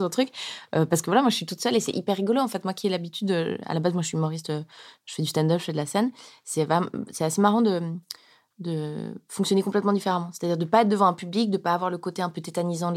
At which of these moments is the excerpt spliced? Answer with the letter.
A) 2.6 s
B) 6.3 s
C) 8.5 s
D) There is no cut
D